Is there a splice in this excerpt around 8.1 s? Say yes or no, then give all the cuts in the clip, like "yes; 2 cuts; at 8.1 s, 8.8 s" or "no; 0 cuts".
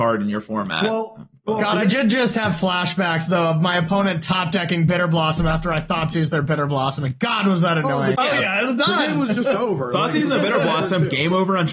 yes; 1 cut; at 8.1 s